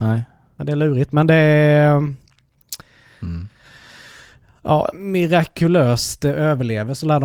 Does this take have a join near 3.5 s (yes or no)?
no